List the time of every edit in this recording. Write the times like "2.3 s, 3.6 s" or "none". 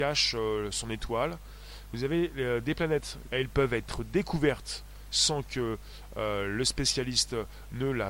3.2 s